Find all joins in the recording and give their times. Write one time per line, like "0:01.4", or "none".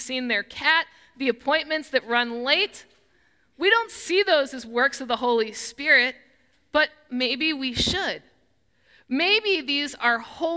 none